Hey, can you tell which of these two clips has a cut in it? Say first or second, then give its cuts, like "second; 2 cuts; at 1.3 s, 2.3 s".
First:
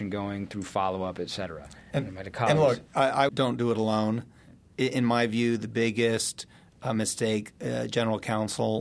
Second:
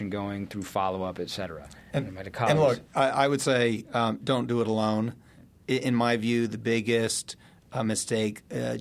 first; 1 cut; at 3.3 s